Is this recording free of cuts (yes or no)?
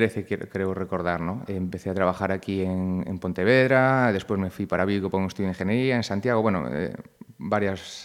no